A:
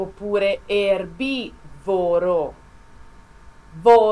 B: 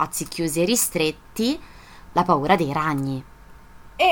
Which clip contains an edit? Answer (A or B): B